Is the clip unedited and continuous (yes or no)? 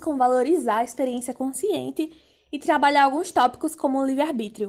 yes